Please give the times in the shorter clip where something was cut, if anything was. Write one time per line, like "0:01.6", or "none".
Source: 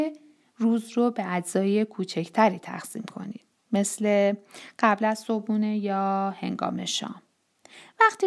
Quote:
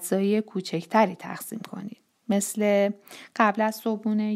none